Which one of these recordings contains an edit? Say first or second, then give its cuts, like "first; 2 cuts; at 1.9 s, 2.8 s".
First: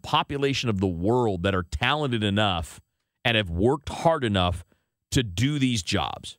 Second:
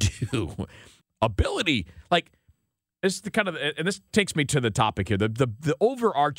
second; 1 cut; at 1.0 s